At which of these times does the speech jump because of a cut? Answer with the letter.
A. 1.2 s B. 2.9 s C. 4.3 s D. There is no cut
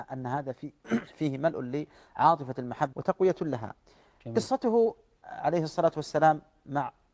B